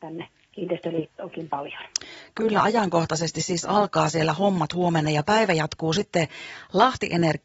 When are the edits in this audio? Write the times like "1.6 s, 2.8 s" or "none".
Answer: none